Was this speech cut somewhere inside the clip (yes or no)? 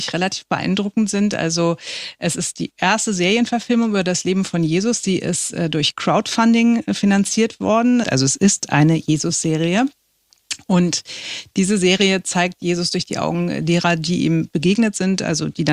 yes